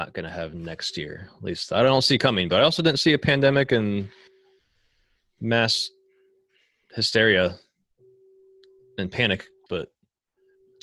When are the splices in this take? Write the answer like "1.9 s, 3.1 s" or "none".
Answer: 9.7 s